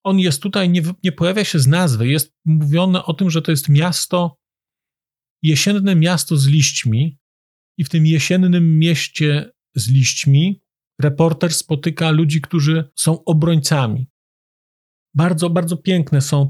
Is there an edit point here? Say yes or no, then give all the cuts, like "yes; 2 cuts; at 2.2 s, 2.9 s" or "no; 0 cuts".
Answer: no; 0 cuts